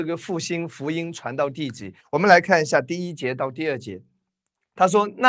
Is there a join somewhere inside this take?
yes; 1 cut; at 2.0 s

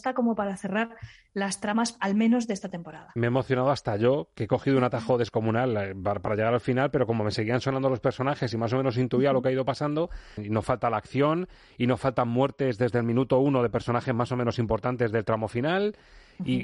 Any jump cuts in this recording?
yes; 1 cut; at 10.4 s

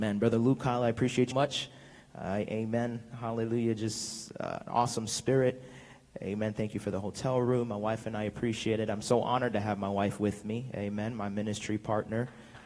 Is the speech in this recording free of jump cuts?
no; 1 cut; at 1.3 s

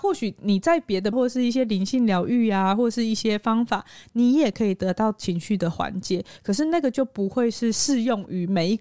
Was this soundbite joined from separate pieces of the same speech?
yes; 1 cut; at 1.1 s

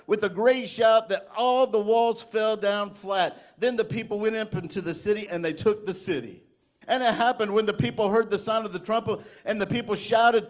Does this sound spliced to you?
yes; 2 cuts; at 5.3 s, 6.8 s

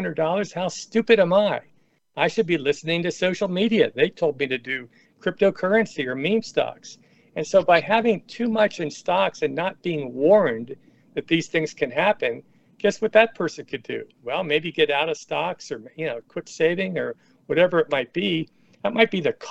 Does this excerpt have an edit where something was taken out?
no; 0 cuts

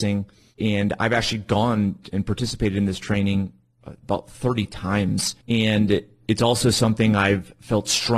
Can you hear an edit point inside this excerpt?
yes; 1 cut; at 5.4 s

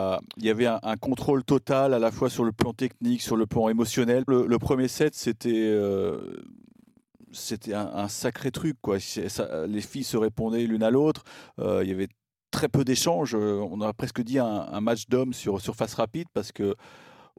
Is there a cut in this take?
yes; 1 cut; at 4.3 s

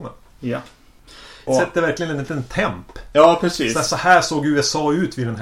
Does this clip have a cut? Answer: yes; 1 cut; at 1.5 s

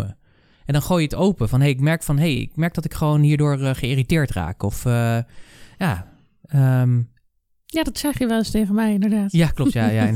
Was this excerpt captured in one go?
yes; 0 cuts

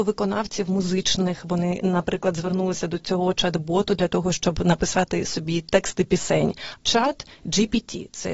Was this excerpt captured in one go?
no; 1 cut; at 6.8 s

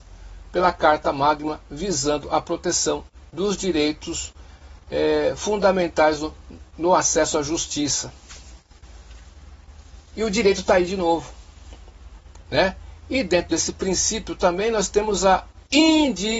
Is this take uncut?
no; 1 cut; at 12.5 s

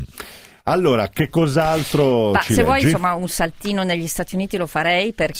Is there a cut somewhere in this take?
no; 0 cuts

